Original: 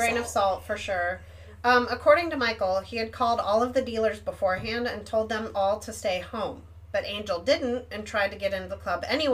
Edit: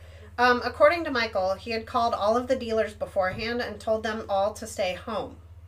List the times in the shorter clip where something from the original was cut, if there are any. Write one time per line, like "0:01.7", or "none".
none